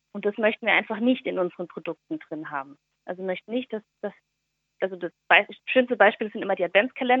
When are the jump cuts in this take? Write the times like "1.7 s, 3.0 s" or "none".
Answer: none